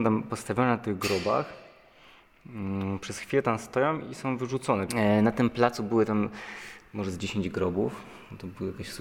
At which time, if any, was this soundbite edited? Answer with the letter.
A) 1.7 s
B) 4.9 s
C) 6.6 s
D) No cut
B